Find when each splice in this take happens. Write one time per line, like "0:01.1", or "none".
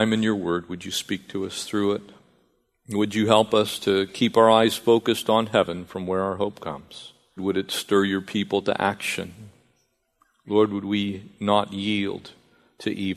0:07.4